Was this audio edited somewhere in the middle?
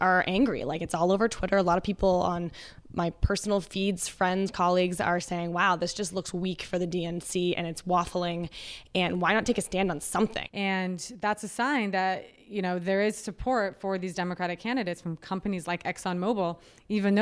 yes; 1 cut; at 10.4 s

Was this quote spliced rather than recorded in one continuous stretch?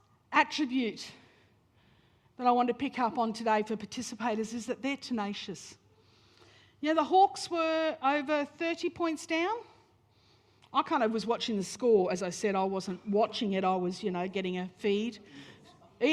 no; 0 cuts

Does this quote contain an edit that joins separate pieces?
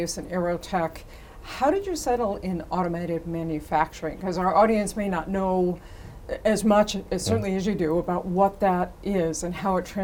no; 0 cuts

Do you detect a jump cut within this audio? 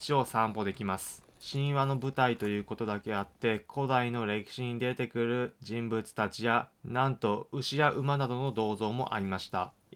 no; 0 cuts

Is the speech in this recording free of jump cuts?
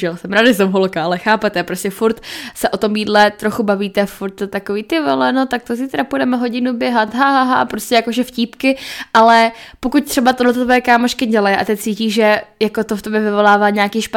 yes; 0 cuts

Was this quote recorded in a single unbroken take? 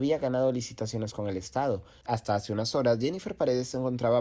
no; 1 cut; at 2.0 s

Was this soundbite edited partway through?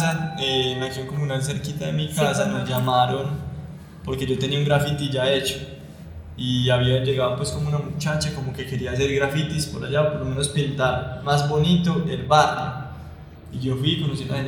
no; 0 cuts

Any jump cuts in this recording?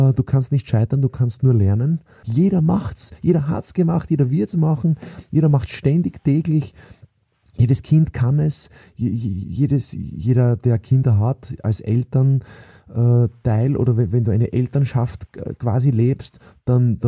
yes; 1 cut; at 2.2 s

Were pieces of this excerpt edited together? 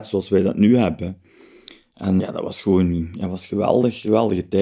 yes; 1 cut; at 2.2 s

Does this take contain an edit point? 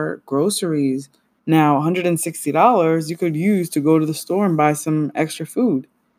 yes; 1 cut; at 1.4 s

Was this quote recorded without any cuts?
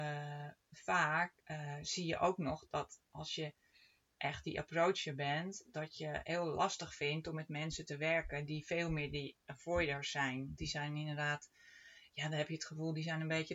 no; 1 cut; at 1.4 s

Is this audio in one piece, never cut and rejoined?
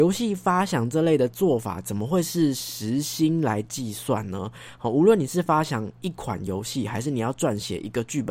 yes; 0 cuts

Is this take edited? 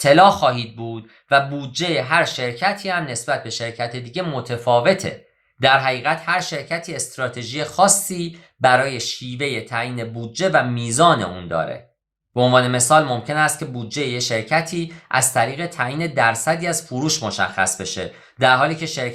no; 0 cuts

